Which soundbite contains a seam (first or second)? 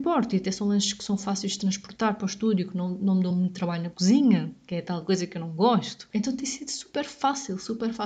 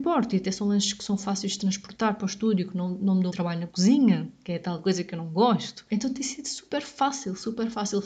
second